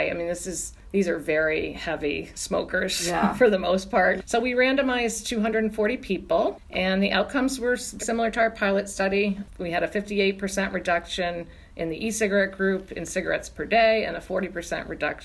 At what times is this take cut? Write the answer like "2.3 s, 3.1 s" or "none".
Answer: 4.2 s, 8.0 s